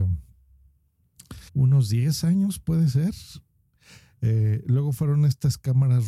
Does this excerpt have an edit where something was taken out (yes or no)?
yes